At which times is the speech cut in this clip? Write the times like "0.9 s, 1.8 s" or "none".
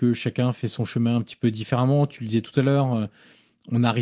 none